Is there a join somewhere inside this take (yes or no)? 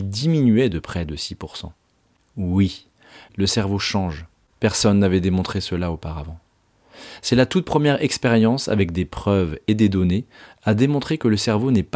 no